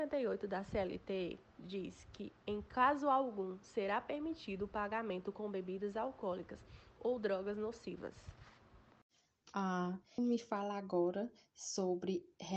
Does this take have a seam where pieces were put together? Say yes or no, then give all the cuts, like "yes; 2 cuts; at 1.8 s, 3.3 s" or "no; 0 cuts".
yes; 1 cut; at 10.2 s